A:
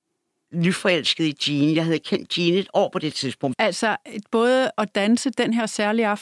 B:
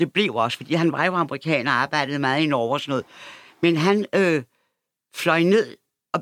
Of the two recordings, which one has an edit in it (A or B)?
A